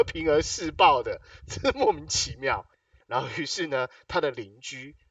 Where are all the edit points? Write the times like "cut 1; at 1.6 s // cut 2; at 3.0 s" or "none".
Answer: cut 1; at 3.0 s